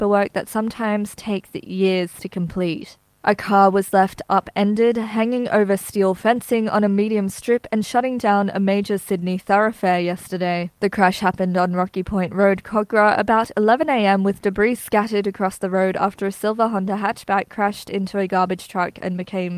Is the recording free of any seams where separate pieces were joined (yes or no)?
yes